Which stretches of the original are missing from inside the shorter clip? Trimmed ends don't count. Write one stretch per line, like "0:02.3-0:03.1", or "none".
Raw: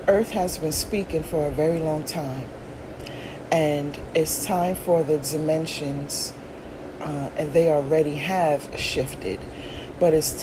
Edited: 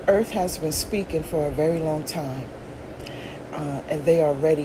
0:03.5-0:07.0